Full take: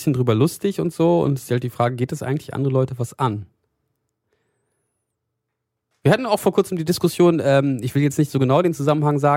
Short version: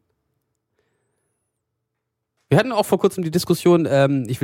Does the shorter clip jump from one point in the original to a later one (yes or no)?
no